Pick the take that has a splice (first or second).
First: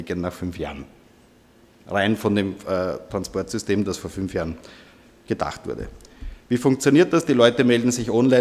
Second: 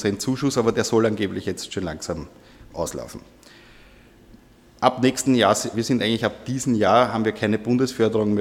second